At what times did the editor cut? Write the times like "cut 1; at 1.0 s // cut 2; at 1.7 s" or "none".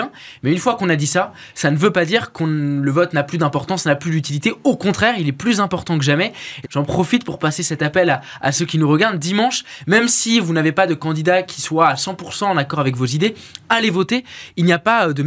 cut 1; at 6.6 s